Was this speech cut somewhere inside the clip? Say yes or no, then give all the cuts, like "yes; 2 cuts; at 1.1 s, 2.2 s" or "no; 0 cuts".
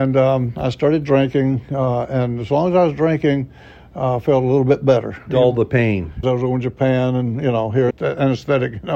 yes; 2 cuts; at 6.2 s, 7.9 s